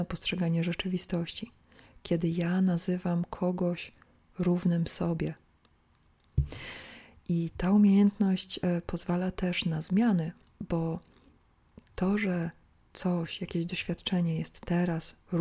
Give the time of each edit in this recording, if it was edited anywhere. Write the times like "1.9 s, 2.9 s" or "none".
none